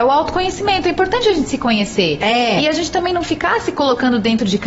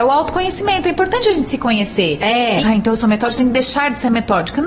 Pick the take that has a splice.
second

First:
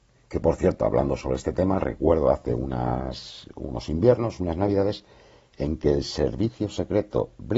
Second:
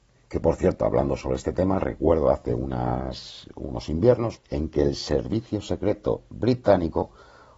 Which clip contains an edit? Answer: second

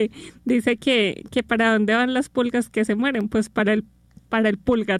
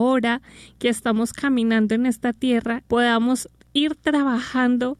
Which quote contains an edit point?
second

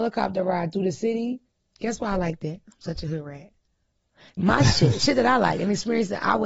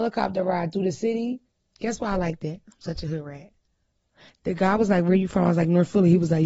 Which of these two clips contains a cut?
first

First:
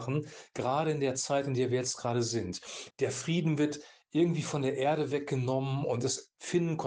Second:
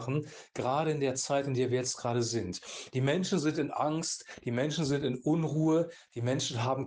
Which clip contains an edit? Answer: first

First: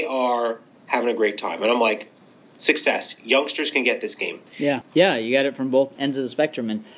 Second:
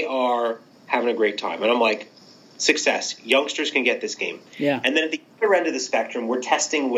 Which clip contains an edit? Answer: first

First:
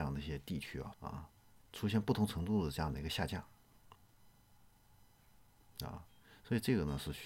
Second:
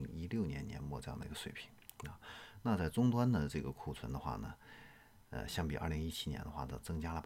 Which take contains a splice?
first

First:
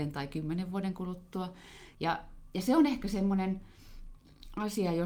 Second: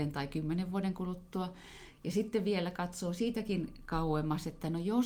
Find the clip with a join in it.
first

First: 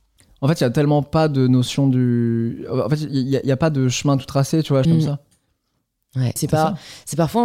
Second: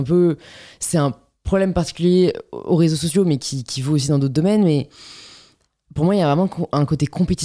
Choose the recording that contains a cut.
first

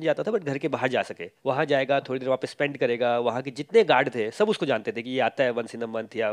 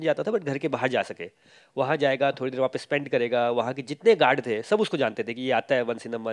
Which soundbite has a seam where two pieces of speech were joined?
first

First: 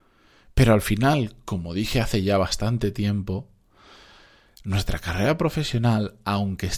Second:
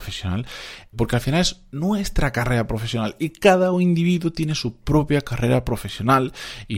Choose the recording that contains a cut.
second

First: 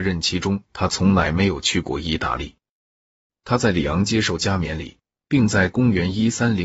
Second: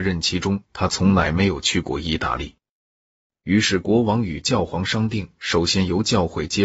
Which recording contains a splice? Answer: second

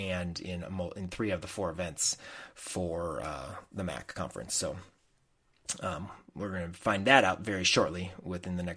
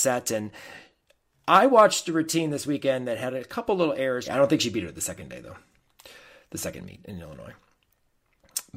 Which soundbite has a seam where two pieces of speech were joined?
second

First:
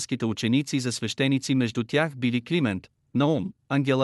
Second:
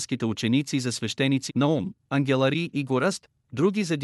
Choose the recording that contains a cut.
second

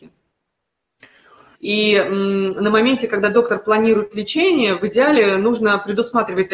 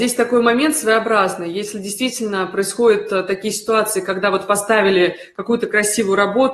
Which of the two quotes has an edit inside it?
first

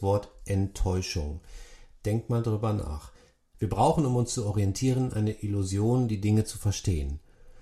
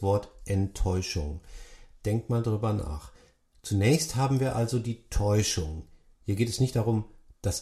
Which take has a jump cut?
first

